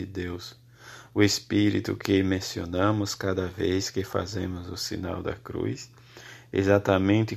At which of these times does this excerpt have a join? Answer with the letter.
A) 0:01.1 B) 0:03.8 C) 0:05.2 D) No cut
A